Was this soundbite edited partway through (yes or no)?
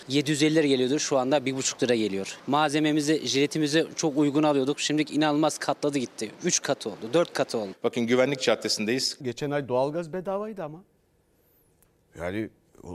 yes